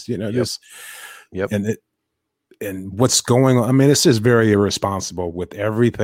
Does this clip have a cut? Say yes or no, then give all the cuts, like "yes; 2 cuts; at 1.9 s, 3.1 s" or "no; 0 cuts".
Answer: no; 0 cuts